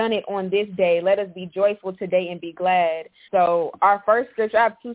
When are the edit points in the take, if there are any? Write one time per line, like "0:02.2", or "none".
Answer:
0:03.3